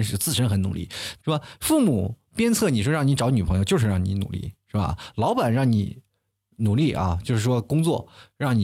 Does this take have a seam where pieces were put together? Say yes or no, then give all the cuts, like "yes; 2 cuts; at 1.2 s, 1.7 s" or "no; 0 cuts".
yes; 1 cut; at 1.2 s